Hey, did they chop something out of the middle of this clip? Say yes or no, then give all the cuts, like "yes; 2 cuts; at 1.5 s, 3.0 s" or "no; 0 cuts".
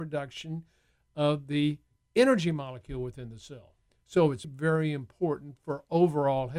yes; 1 cut; at 4.4 s